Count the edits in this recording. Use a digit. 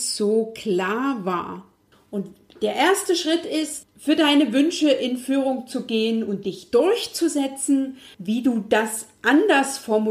3